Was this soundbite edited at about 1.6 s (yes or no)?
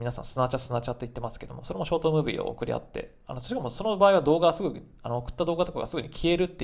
no